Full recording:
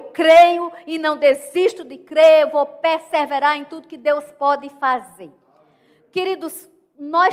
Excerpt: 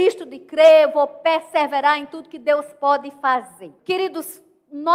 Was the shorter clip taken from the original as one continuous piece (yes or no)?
no